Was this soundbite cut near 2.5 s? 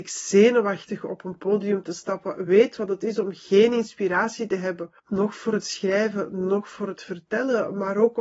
yes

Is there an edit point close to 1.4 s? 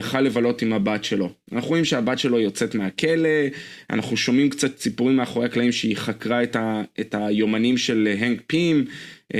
no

